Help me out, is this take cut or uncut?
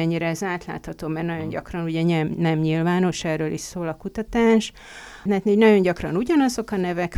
cut